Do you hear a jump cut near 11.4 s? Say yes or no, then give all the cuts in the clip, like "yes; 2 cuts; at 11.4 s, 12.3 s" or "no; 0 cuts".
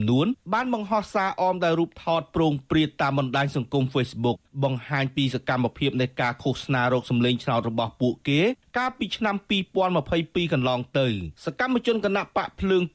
yes; 1 cut; at 11.4 s